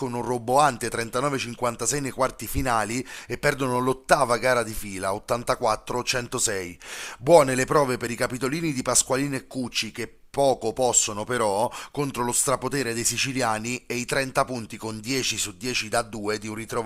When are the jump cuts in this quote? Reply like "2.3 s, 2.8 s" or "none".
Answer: none